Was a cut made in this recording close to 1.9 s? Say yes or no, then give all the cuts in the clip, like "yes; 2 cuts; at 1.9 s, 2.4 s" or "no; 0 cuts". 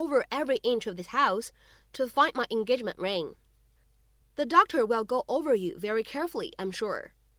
no; 1 cut; at 4.2 s